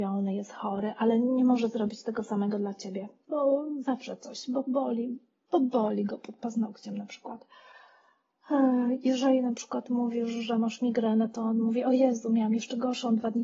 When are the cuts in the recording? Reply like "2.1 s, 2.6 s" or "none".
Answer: 3.3 s